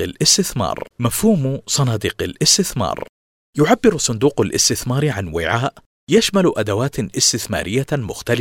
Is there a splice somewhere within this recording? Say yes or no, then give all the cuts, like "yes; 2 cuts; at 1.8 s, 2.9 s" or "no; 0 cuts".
yes; 1 cut; at 0.9 s